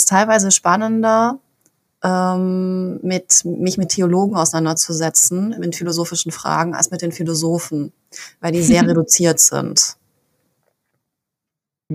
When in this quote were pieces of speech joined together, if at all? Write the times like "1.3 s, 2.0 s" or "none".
none